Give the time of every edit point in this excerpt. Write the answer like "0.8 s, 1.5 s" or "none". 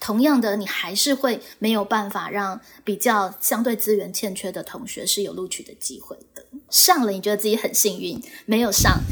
6.7 s